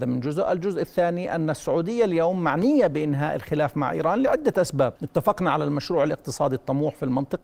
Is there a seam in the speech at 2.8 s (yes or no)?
no